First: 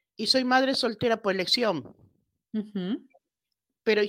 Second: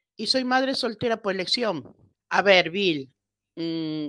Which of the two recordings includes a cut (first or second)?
second